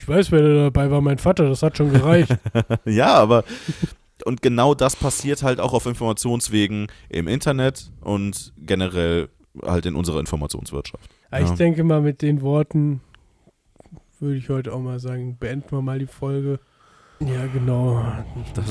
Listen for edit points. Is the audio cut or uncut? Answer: cut